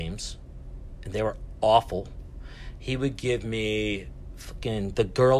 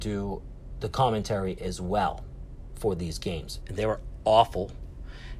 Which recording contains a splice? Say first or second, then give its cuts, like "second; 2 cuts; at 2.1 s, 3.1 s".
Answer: second; 1 cut; at 3.6 s